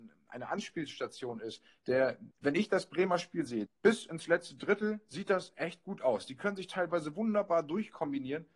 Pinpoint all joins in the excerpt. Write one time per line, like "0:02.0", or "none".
0:02.3
0:03.7